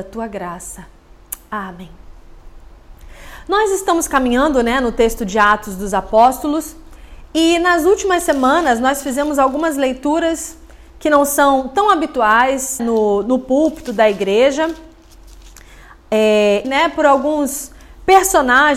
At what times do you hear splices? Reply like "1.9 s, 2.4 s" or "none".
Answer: 12.8 s, 16.6 s